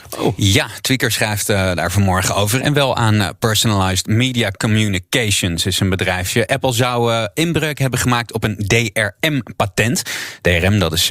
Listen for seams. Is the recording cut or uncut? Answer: cut